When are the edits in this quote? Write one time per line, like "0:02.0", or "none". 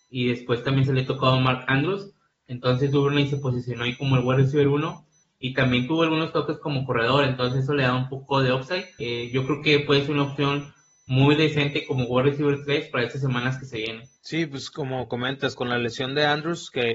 0:09.0
0:14.2